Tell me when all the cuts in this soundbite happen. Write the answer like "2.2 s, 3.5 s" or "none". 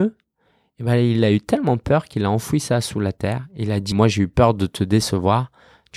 3.9 s